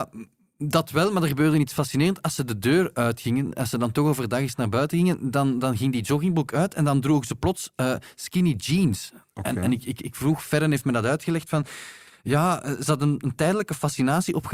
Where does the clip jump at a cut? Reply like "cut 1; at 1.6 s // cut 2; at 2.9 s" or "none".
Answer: none